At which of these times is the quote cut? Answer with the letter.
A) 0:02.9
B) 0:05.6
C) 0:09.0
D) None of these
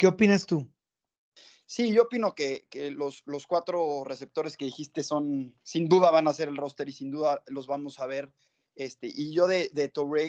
B